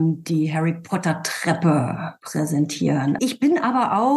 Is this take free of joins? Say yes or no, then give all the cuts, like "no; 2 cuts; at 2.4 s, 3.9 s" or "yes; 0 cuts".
no; 1 cut; at 3.2 s